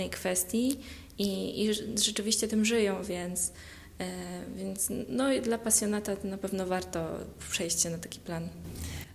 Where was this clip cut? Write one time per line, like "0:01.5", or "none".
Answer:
none